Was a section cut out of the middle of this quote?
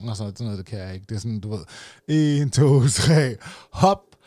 no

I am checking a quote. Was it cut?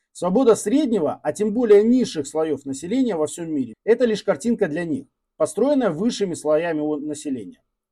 yes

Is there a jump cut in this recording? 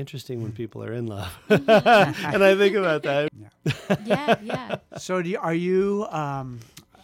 yes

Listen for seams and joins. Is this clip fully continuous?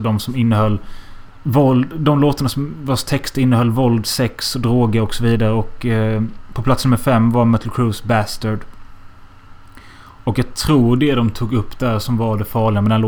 yes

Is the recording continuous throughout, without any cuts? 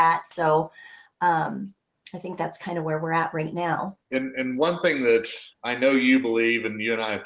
no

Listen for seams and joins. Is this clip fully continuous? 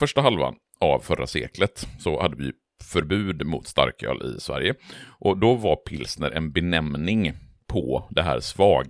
yes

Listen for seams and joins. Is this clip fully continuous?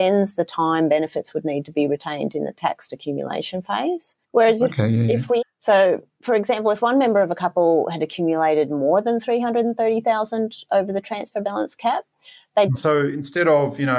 no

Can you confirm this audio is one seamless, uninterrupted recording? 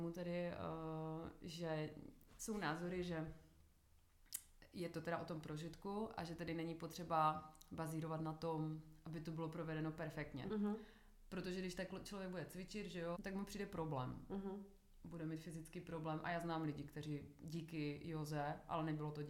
no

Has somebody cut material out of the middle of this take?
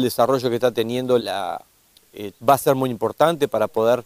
yes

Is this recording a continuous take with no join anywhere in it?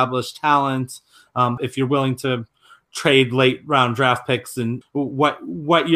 no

